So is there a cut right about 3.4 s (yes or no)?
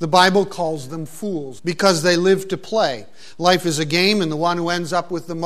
no